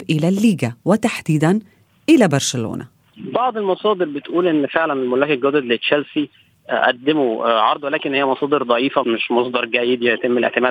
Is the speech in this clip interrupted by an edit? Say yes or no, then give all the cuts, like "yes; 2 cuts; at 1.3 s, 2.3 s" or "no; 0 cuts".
yes; 1 cut; at 9.0 s